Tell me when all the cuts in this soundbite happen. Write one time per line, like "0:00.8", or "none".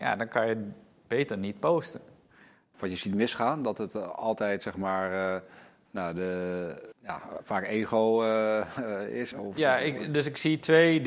0:02.7
0:06.9
0:09.3